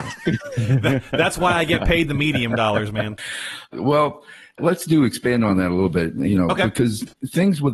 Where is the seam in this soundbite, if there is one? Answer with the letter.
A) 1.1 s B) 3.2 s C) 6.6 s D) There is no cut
B